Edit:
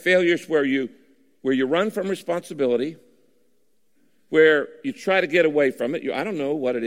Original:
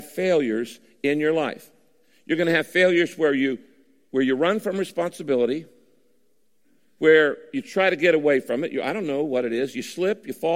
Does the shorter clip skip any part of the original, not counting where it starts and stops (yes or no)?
no